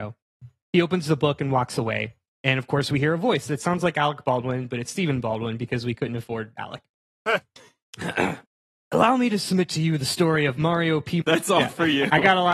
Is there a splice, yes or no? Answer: yes